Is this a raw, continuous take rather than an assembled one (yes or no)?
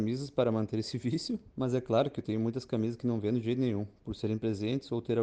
no